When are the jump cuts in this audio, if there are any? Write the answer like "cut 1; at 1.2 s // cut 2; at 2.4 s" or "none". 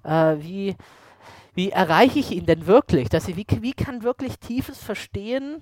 none